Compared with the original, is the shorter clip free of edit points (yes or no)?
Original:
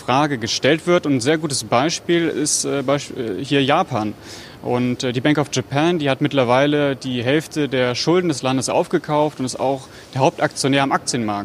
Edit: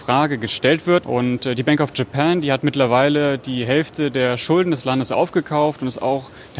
no